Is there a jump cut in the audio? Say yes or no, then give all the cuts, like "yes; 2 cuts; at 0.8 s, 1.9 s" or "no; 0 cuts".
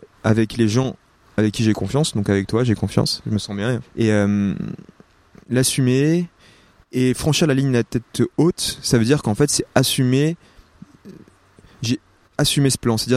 no; 0 cuts